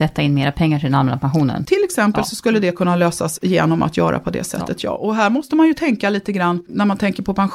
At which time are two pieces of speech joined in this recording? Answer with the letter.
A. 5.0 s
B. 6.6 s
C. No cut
C